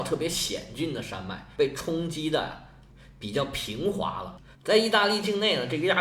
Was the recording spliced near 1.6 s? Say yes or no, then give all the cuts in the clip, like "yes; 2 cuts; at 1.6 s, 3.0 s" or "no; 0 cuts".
yes; 2 cuts; at 1.6 s, 4.6 s